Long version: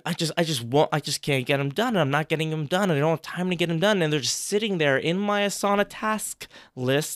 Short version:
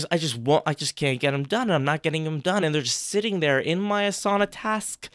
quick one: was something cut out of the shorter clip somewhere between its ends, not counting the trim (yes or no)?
yes